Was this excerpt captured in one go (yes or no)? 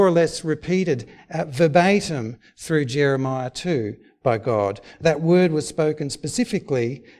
yes